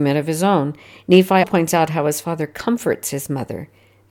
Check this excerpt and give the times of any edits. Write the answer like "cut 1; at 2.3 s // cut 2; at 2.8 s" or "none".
cut 1; at 1.4 s